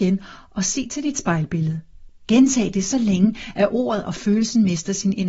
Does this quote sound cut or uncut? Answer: cut